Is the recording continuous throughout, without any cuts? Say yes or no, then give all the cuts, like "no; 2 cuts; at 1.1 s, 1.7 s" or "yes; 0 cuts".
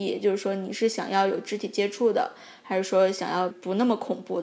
no; 1 cut; at 3.5 s